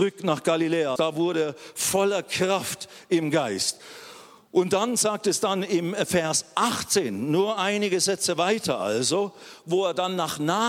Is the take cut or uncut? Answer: cut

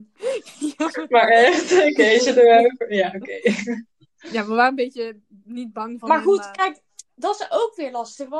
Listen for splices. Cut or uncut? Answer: uncut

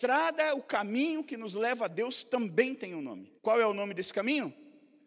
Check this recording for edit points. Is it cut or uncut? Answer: cut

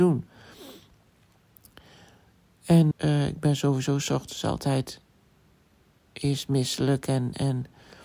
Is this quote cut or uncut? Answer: cut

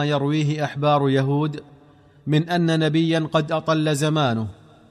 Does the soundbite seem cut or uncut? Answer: uncut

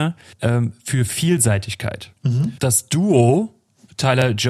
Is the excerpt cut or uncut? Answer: cut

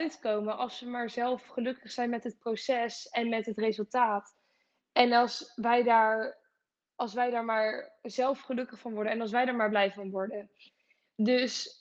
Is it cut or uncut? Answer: uncut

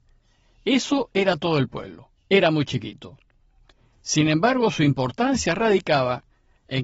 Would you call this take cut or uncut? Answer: cut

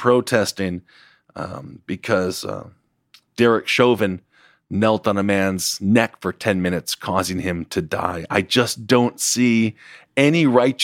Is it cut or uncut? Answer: uncut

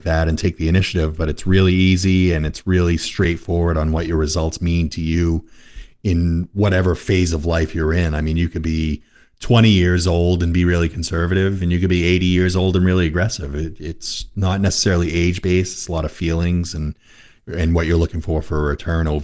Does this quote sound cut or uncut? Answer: uncut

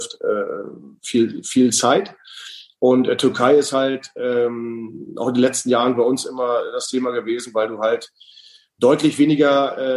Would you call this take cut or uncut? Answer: uncut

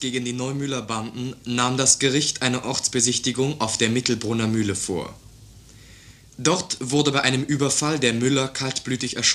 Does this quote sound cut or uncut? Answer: uncut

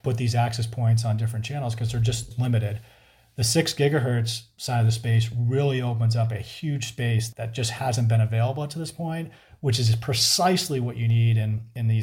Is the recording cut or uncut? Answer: uncut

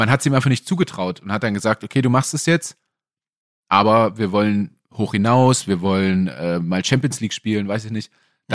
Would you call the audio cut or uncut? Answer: uncut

